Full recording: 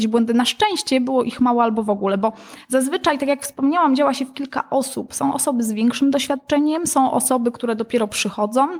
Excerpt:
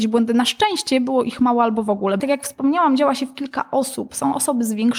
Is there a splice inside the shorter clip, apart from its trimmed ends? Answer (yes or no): yes